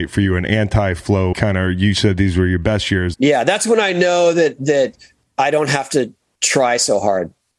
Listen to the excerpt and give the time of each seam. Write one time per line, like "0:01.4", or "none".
0:01.3
0:03.1